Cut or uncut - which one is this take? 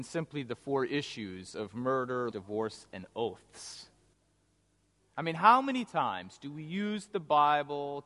cut